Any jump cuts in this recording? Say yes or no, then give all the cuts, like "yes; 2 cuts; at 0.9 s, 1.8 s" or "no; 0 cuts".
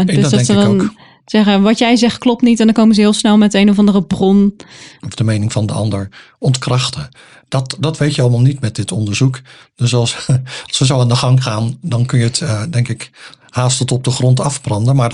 yes; 1 cut; at 5.0 s